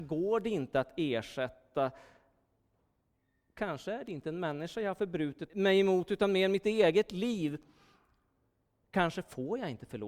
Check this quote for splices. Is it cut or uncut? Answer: cut